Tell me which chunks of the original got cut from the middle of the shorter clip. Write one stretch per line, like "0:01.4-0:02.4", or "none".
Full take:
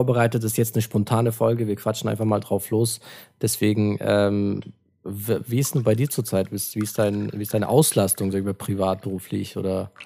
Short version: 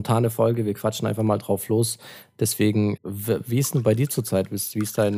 0:04.0-0:05.0